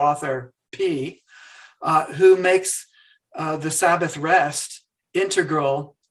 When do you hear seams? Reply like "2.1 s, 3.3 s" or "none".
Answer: none